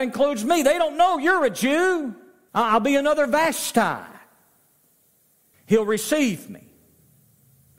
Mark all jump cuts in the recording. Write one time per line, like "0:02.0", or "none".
0:02.5
0:05.5